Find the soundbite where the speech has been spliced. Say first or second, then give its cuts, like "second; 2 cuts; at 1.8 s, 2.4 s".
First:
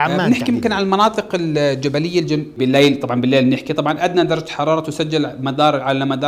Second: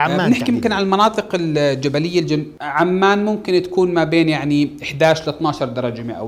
first; 1 cut; at 2.6 s